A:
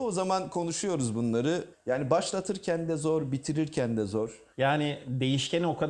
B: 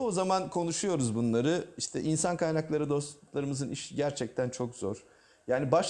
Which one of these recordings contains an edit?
A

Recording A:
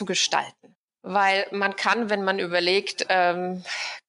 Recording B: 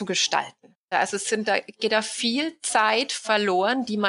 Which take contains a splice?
B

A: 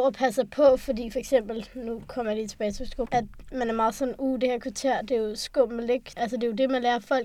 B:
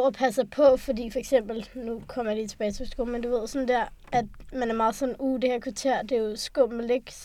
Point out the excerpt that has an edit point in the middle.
A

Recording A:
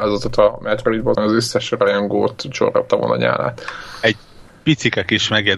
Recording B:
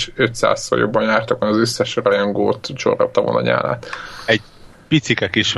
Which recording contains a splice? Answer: A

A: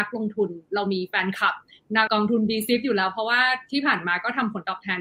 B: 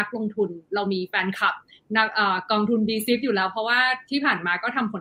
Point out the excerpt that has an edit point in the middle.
A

